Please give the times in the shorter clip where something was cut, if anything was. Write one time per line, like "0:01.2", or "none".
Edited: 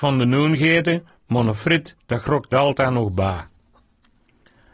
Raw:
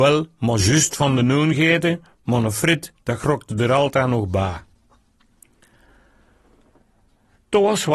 0:02.5

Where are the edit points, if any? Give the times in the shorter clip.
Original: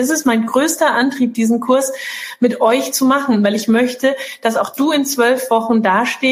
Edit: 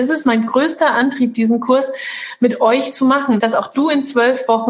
0:03.4

